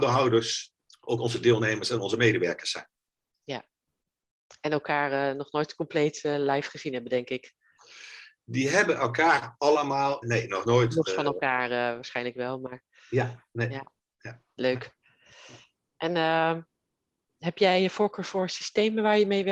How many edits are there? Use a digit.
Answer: 1